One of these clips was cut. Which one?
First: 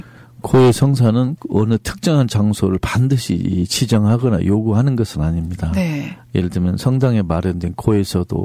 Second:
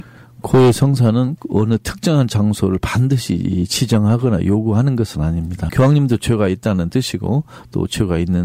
second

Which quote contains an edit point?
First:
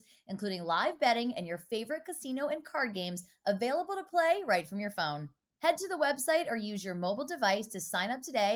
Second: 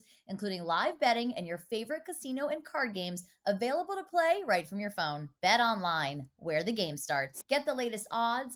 second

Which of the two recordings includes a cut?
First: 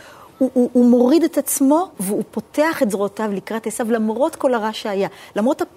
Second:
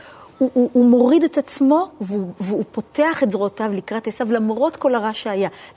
first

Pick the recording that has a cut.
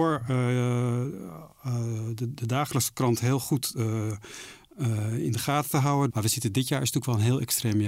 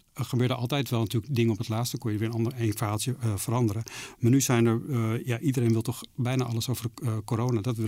first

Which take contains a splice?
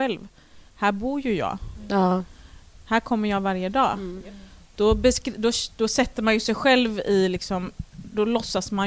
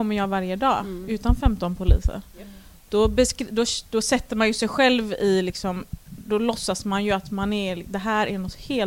first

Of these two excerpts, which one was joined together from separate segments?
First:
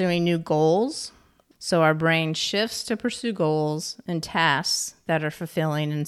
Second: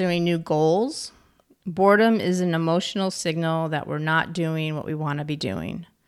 first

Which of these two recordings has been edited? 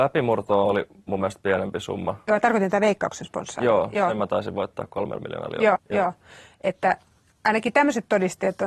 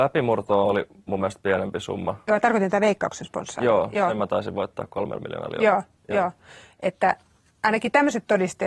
first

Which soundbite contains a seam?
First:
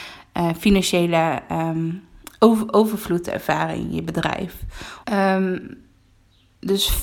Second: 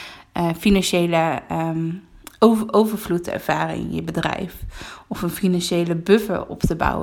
first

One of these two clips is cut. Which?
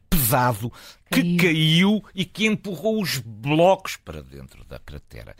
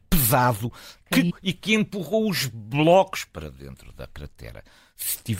second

